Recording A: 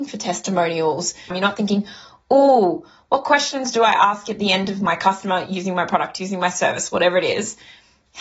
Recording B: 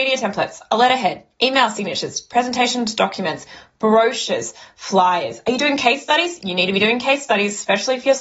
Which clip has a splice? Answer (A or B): A